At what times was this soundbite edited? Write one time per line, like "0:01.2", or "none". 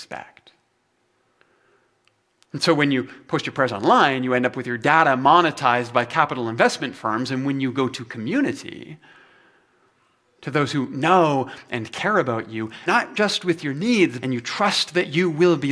0:12.9
0:14.2